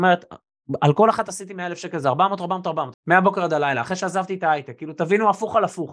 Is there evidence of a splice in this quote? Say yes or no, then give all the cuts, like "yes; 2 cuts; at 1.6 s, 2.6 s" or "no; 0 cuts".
yes; 1 cut; at 2.9 s